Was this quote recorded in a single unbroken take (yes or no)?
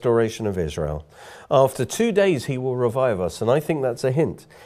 yes